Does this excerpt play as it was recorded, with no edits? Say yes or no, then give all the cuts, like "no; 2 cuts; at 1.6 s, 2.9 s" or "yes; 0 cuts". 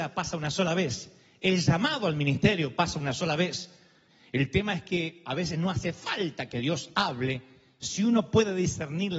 yes; 0 cuts